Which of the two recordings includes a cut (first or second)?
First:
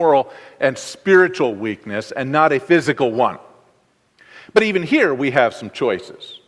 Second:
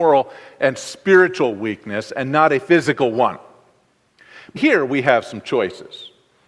second